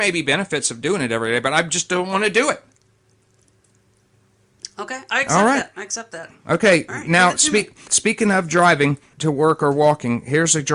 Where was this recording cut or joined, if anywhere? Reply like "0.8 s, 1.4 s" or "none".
7.9 s, 9.1 s